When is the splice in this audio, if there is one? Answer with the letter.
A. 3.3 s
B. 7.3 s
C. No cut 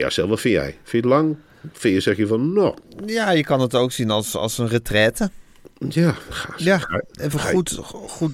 C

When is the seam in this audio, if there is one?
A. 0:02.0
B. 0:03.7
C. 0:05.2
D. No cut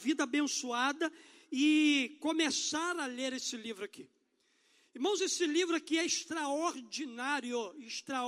D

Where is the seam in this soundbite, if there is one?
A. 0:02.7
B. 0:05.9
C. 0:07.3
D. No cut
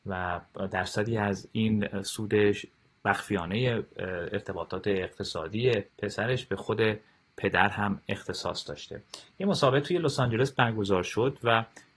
B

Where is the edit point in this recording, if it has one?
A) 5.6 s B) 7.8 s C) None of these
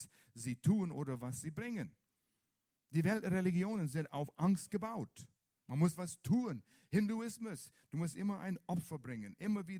C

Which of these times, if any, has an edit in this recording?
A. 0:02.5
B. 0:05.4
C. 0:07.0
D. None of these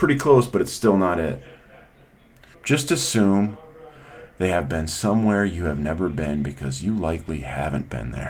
A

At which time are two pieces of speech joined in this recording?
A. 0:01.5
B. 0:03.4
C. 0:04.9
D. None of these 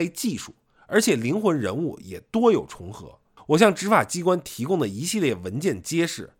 B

